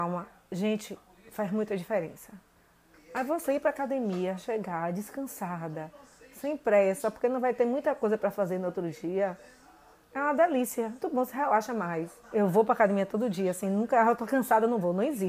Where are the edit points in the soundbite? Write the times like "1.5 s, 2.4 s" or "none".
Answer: 2.9 s, 11.0 s, 12.2 s